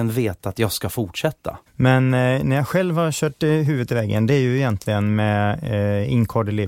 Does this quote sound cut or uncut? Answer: cut